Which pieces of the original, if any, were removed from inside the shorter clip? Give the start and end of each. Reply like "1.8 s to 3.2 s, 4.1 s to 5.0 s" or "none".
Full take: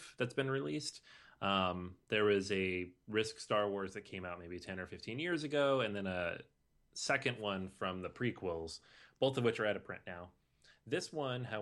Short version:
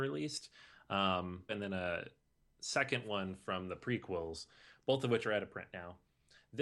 2.0 s to 5.8 s